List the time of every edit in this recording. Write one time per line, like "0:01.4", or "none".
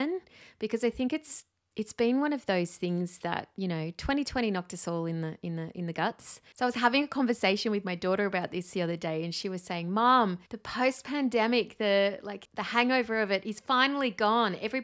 0:10.5